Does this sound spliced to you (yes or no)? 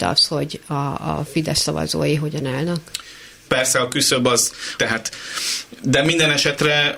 yes